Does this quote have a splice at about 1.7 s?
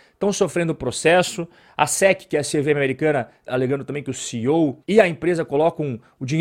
no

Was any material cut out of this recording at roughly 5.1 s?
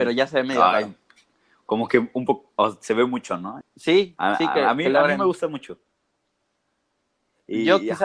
no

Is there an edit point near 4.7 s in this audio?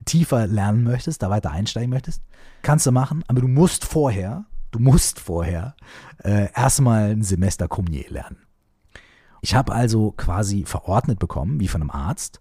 no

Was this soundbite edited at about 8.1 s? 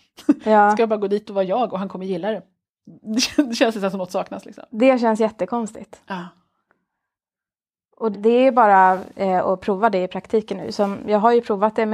yes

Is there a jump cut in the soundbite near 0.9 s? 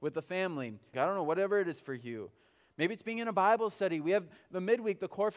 yes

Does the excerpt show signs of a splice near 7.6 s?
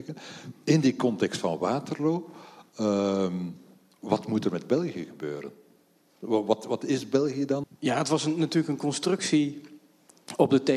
yes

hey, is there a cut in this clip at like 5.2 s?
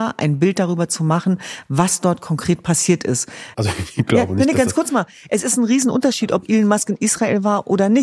no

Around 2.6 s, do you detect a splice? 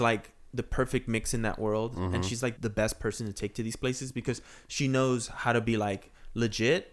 yes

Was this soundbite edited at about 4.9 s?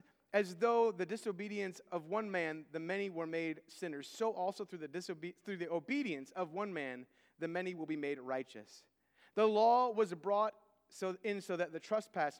no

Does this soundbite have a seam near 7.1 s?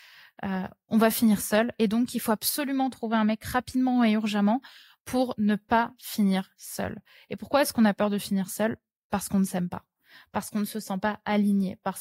no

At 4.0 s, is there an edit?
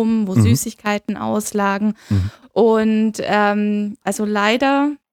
yes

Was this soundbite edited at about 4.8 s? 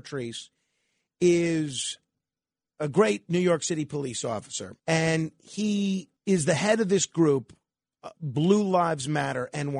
yes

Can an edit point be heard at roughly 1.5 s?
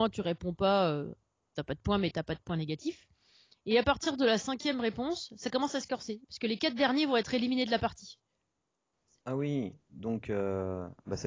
no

